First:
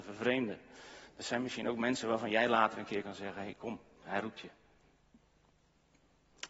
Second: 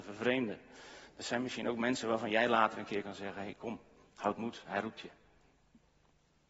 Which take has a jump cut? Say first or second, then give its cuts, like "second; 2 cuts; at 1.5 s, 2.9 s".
first; 1 cut; at 4.0 s